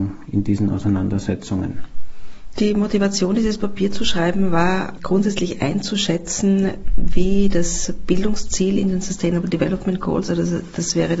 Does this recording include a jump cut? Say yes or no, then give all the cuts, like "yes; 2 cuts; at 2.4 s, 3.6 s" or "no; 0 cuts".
no; 0 cuts